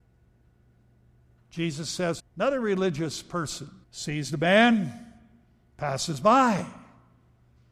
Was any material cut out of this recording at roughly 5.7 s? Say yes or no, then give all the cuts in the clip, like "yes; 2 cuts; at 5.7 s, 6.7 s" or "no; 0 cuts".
no; 2 cuts; at 2.2 s, 3.8 s